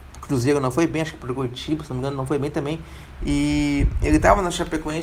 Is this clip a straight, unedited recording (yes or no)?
no